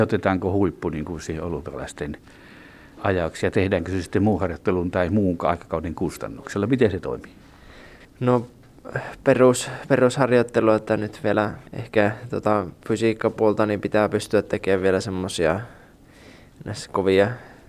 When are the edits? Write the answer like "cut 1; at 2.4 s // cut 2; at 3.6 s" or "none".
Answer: cut 1; at 8.0 s // cut 2; at 11.7 s